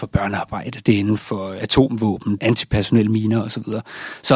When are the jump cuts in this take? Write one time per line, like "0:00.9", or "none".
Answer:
0:01.2
0:02.4